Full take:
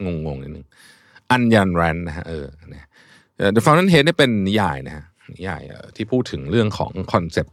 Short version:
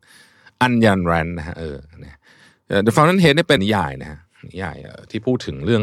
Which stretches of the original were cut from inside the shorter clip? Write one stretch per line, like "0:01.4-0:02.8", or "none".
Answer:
0:04.3-0:04.4